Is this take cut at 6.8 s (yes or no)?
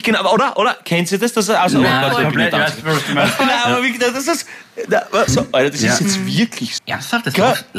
yes